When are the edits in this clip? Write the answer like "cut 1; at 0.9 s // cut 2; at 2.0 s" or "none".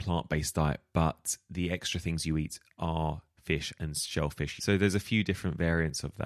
cut 1; at 4.6 s